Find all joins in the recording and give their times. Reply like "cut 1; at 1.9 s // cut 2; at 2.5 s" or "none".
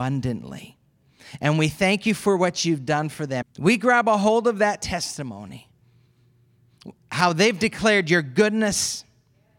cut 1; at 3.4 s